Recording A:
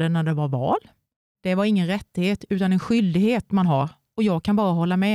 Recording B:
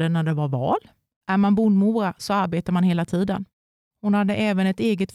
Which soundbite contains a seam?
B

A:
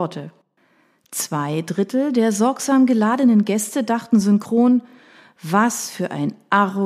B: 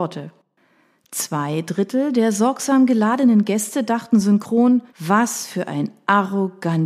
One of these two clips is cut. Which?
B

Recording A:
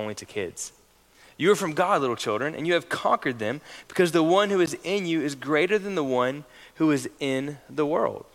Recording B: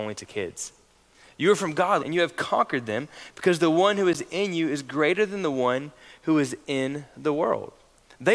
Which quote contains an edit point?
B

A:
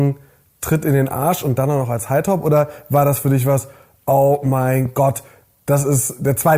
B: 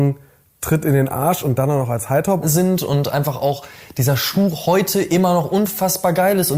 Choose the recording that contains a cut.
B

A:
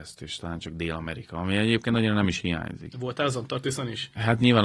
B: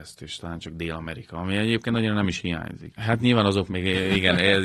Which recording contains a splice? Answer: B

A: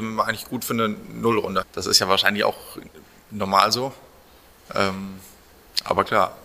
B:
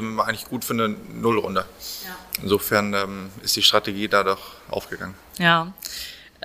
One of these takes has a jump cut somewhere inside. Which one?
A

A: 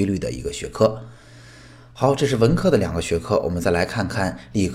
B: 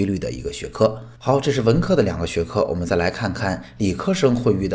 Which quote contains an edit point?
B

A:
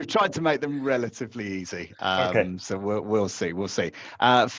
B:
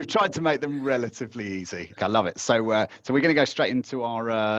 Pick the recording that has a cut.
B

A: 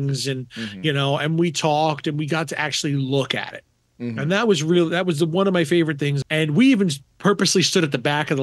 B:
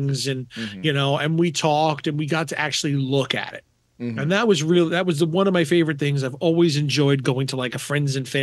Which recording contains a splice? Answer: A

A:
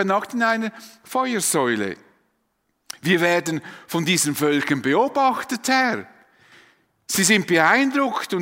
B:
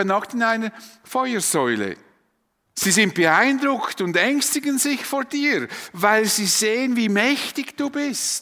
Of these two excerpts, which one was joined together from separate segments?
B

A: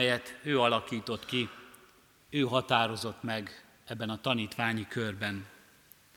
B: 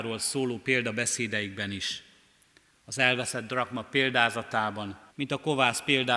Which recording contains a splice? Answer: B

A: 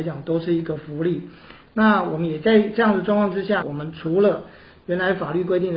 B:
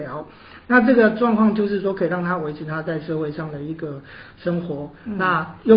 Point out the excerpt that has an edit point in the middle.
A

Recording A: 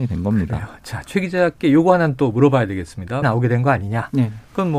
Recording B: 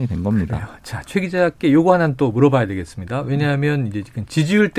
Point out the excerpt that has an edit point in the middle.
A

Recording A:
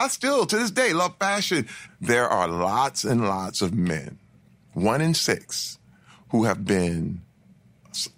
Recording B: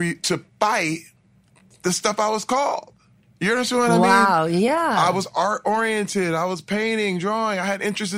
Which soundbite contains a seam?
A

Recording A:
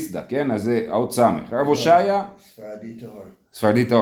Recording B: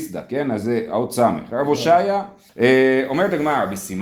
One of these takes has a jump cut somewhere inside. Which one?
B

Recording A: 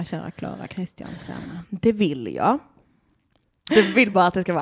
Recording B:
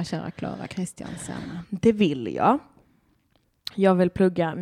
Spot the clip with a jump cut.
A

